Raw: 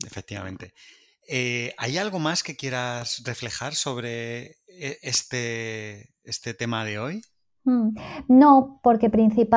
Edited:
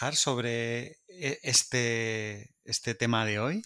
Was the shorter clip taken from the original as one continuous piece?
yes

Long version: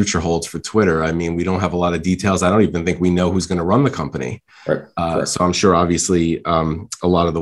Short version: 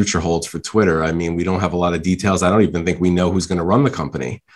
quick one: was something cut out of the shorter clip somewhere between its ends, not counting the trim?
no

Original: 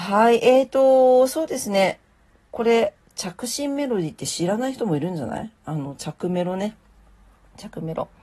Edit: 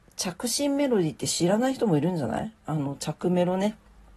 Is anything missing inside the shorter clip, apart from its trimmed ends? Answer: no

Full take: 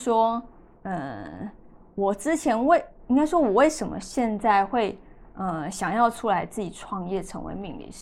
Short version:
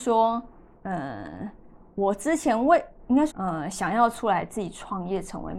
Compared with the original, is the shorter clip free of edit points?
no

